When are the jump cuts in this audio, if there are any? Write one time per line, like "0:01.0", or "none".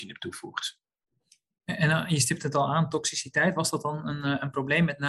none